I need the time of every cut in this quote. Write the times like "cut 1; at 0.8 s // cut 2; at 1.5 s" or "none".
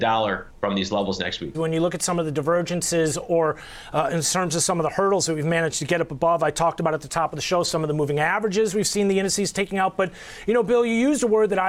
cut 1; at 1.5 s